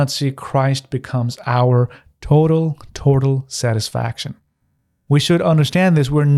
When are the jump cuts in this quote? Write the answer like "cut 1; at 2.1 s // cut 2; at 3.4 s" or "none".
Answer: none